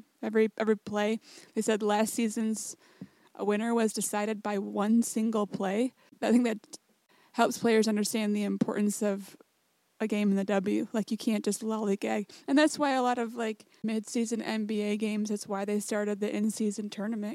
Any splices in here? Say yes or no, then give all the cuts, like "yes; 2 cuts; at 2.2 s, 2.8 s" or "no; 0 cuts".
no; 0 cuts